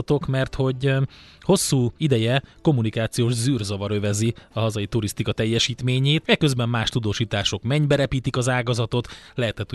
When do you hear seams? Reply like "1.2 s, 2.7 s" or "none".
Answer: 2.0 s, 6.2 s

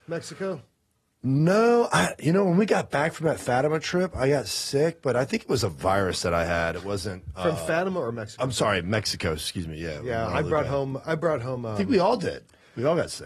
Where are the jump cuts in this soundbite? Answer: none

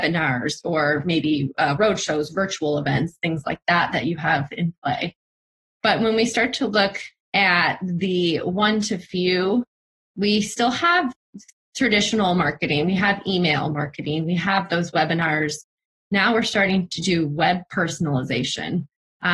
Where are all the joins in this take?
none

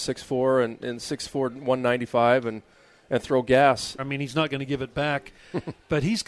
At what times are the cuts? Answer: 4.0 s

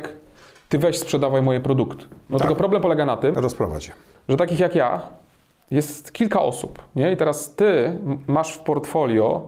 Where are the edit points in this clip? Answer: none

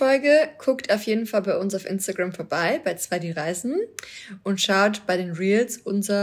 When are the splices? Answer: none

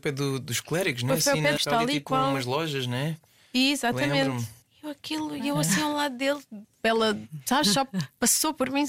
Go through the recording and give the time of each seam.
1.6 s, 6.8 s

